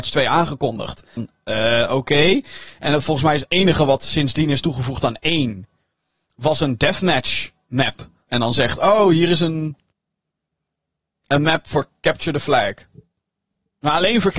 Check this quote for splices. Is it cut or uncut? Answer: cut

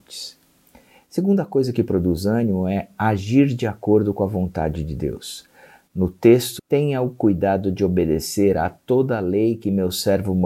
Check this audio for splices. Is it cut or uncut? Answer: cut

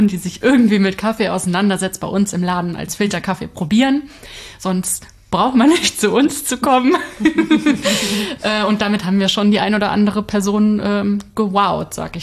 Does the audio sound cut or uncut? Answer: uncut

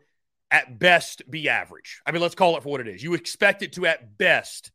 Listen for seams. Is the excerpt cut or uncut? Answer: uncut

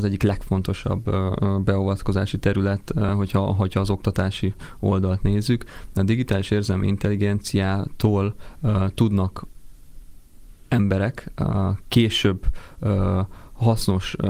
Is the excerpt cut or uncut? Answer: uncut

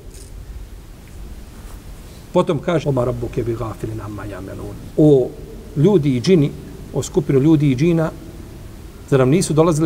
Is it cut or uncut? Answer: cut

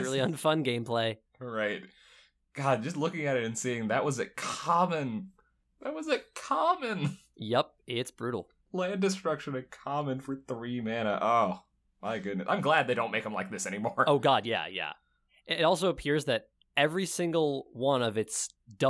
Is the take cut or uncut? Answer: uncut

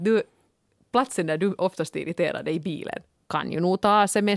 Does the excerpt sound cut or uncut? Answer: cut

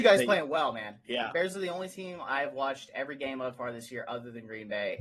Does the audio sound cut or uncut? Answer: cut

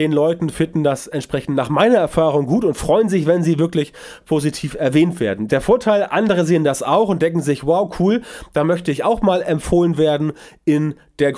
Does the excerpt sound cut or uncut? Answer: uncut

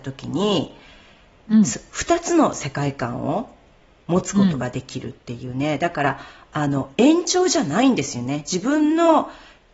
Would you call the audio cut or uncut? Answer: uncut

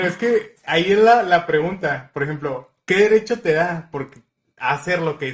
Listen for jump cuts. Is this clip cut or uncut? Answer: uncut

